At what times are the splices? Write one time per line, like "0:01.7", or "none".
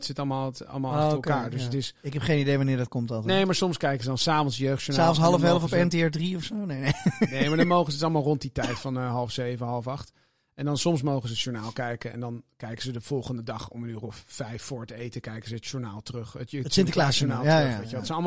none